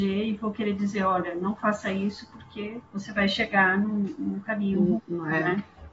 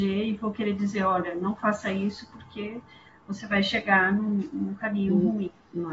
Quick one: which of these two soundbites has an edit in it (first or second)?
first